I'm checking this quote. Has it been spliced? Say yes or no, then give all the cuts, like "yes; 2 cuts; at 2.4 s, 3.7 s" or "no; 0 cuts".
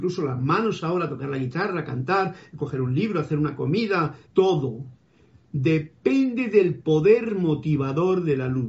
yes; 1 cut; at 4.3 s